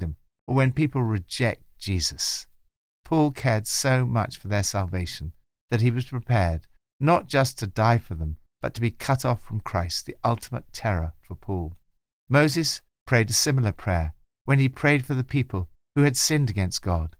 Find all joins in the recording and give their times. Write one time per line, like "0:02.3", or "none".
none